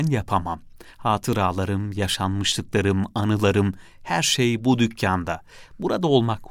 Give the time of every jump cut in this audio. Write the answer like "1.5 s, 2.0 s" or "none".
none